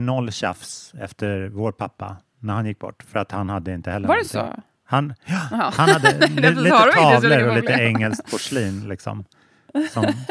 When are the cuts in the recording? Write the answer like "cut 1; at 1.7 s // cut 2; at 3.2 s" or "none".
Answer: none